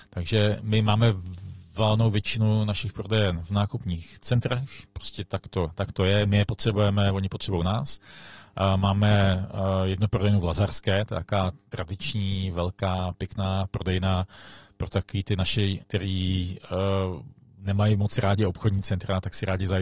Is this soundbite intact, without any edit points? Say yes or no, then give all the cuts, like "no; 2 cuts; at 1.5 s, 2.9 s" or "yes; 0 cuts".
no; 1 cut; at 15.8 s